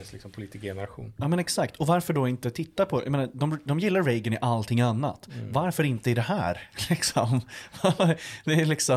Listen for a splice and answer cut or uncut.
uncut